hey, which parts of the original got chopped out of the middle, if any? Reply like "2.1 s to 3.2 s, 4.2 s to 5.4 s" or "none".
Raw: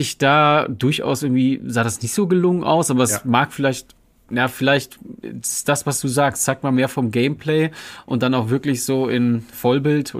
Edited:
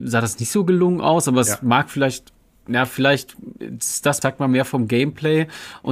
5.8 s to 6.5 s